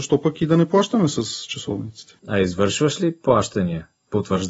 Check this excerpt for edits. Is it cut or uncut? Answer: cut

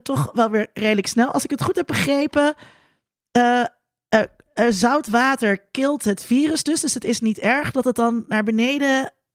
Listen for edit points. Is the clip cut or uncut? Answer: uncut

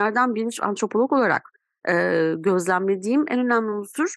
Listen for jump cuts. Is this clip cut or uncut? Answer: uncut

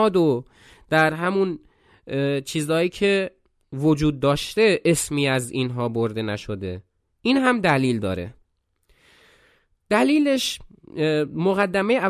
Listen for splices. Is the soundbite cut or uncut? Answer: uncut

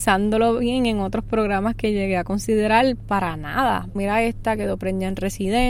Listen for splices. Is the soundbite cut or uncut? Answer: cut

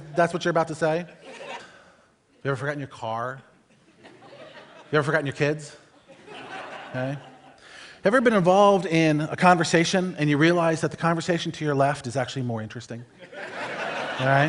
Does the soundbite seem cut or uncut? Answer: cut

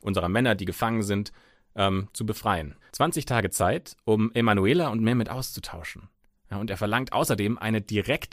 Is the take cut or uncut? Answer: cut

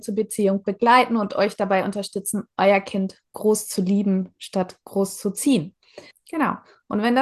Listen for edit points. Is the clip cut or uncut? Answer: cut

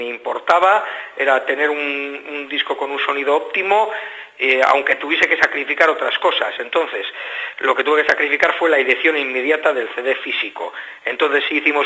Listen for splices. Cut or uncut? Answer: uncut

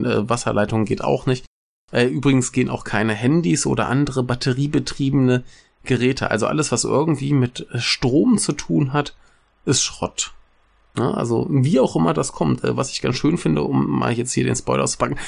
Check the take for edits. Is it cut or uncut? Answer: uncut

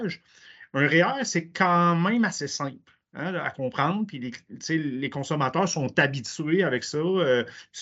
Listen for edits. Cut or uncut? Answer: uncut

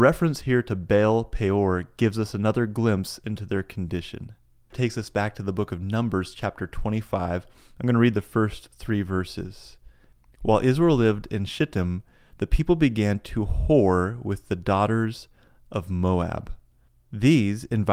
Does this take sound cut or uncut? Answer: uncut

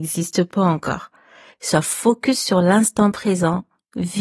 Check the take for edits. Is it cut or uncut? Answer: uncut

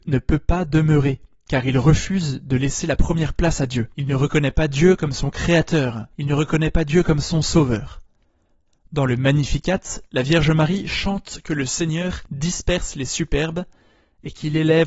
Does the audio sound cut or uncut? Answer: uncut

